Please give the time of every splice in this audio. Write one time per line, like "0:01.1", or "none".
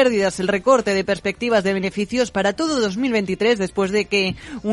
none